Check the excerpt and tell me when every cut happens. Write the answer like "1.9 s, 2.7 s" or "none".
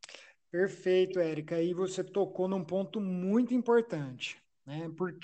none